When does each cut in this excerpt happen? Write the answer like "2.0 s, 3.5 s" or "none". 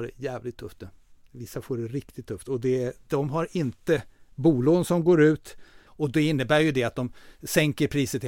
5.9 s